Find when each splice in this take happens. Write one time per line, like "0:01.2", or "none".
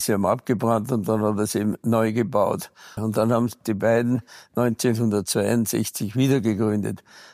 0:03.0